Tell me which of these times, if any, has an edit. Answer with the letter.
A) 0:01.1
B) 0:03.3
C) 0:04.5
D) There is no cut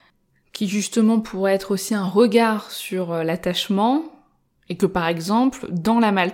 C